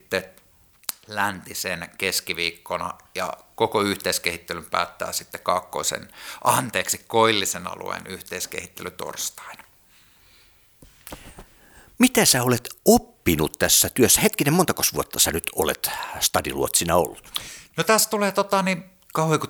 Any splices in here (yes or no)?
no